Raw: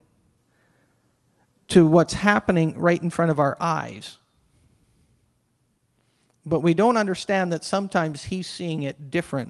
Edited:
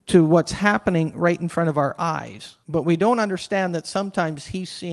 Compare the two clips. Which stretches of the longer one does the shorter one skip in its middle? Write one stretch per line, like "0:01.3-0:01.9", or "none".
0:04.2-0:06.4